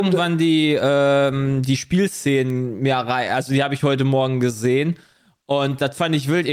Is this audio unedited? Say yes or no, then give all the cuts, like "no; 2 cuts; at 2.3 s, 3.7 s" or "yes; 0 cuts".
yes; 0 cuts